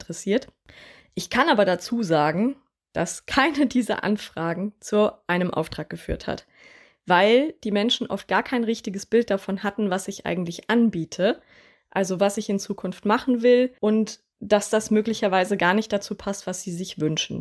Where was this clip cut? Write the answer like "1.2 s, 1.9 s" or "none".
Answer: none